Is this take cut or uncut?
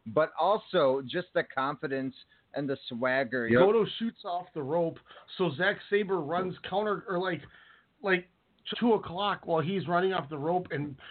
cut